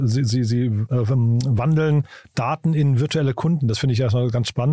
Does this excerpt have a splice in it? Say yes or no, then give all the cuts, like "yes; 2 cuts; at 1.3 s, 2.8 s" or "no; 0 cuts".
no; 0 cuts